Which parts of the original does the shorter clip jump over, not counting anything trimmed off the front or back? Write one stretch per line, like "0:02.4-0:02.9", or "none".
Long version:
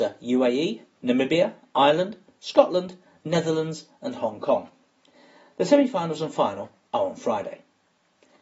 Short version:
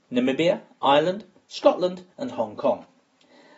0:03.0-0:04.0